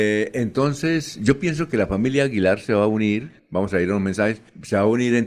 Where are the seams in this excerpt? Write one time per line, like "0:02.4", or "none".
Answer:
none